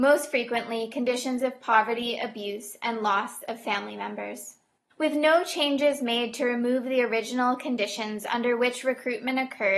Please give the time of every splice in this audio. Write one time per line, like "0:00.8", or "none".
0:04.9